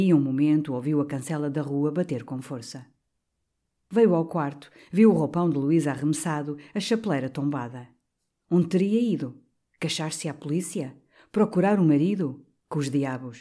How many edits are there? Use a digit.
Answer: 0